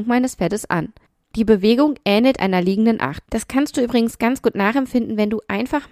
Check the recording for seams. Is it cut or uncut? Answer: cut